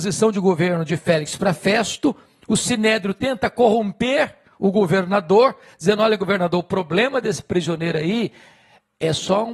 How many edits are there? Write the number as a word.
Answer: zero